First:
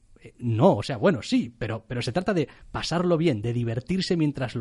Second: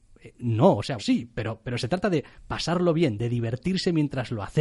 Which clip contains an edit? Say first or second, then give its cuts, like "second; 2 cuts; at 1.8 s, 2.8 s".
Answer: second; 1 cut; at 1.0 s